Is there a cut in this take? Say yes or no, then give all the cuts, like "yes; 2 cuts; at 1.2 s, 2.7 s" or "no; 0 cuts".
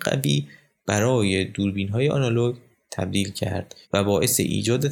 yes; 1 cut; at 3.8 s